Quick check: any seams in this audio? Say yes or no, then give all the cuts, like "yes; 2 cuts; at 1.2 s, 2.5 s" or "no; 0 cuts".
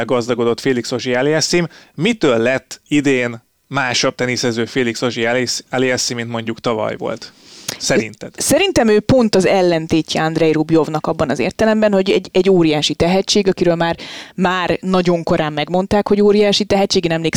no; 0 cuts